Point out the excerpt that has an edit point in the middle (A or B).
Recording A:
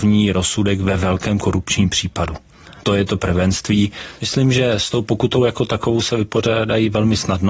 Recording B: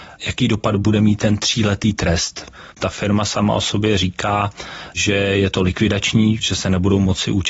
A